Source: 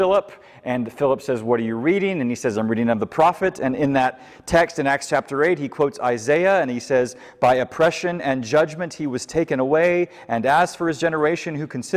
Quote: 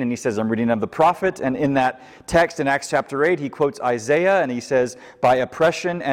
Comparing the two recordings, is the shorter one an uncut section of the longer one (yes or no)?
yes